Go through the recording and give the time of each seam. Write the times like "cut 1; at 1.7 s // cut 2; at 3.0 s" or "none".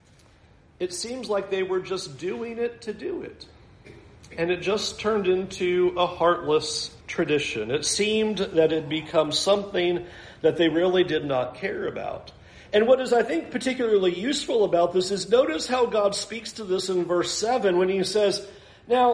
cut 1; at 7.0 s